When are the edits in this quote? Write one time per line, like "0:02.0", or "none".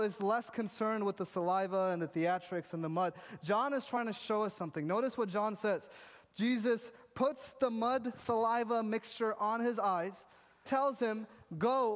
0:10.7